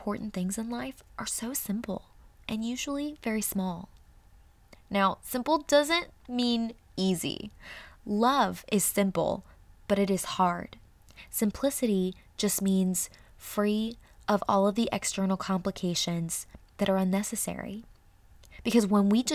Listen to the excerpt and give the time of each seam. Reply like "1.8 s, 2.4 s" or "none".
none